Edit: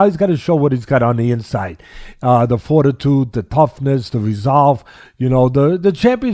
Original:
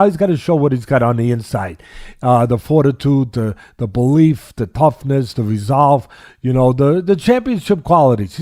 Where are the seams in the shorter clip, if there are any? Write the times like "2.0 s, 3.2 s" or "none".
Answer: 3.3 s